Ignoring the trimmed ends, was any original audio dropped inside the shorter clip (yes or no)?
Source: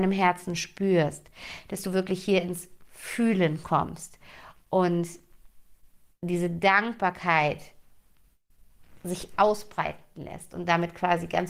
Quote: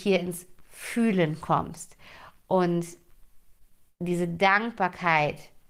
no